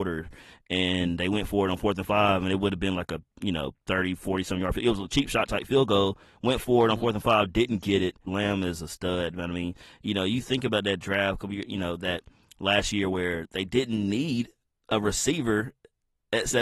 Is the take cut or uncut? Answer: cut